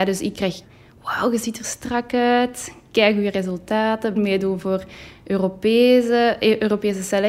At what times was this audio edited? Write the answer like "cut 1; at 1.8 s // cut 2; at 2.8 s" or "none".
cut 1; at 4.2 s